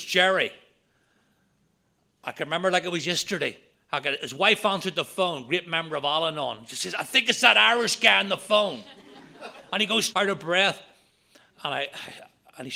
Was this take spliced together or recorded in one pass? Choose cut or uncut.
cut